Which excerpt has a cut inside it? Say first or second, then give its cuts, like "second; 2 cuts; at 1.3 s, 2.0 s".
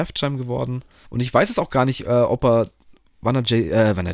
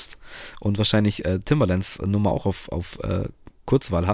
first; 1 cut; at 1.0 s